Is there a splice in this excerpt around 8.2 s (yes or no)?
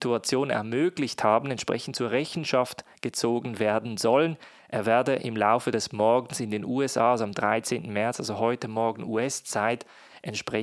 no